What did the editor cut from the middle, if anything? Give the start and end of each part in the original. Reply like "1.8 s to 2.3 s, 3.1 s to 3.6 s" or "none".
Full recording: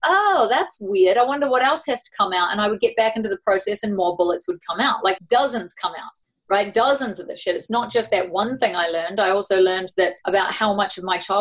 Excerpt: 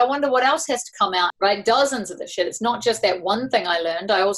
2.5 s to 6.4 s